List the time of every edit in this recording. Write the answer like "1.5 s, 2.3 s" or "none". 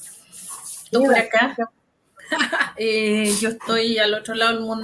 0.9 s, 2.8 s